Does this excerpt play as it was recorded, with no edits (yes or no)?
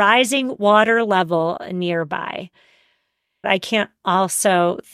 no